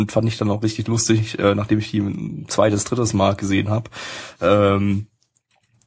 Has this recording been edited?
no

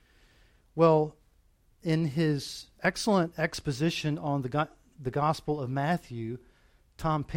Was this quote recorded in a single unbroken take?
no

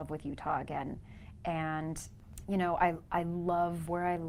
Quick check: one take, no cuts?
yes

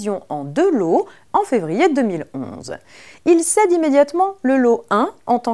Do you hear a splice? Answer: yes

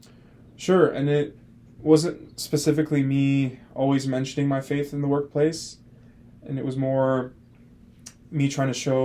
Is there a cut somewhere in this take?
no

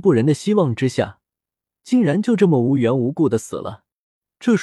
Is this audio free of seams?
yes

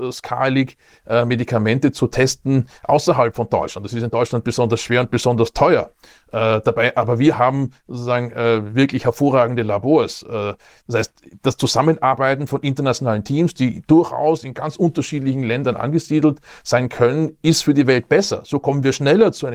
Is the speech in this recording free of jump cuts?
yes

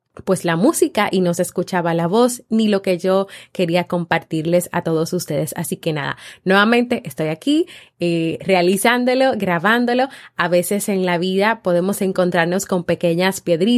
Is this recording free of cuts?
yes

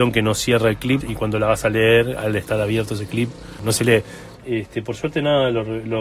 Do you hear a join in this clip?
yes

